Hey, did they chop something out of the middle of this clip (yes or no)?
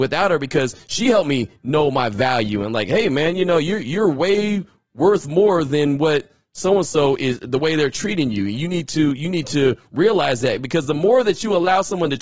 no